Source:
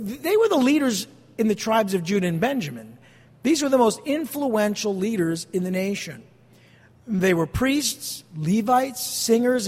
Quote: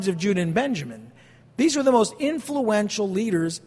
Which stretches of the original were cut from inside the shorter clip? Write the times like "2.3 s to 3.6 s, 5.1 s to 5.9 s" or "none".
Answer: none